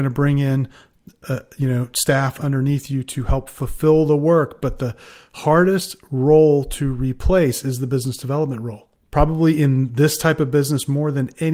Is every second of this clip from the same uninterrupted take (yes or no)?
yes